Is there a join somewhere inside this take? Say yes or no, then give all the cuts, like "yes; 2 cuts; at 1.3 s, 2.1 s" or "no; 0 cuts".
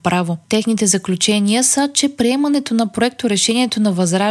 no; 0 cuts